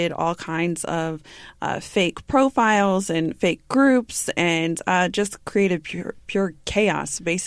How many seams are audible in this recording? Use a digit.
0